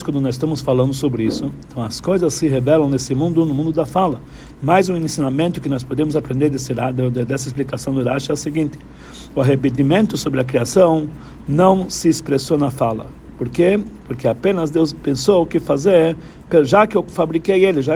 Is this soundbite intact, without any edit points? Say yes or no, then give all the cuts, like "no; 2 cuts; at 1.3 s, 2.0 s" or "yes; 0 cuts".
no; 1 cut; at 4.6 s